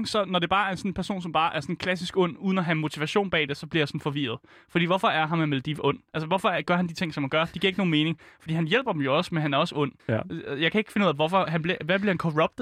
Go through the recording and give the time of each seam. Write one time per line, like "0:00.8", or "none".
0:10.0